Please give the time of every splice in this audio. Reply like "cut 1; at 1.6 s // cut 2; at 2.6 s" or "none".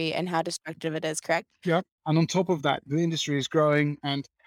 cut 1; at 1.9 s

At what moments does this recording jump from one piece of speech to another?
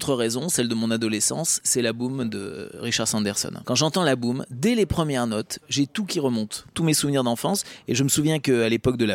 cut 1; at 3.6 s

